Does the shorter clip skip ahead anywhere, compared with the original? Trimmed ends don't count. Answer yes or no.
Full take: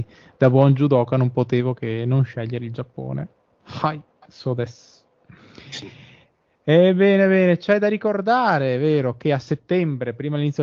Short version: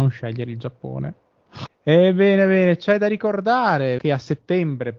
yes